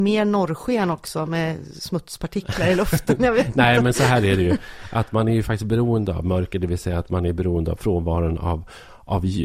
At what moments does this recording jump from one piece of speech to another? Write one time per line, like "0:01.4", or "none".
none